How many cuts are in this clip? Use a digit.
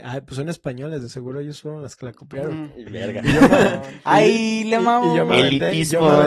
0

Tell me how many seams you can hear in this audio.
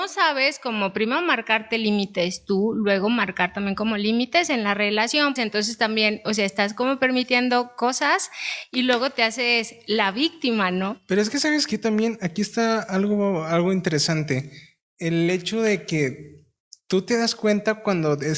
1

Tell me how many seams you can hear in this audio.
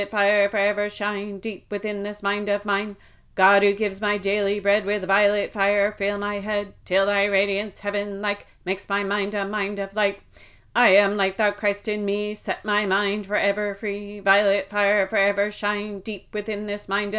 0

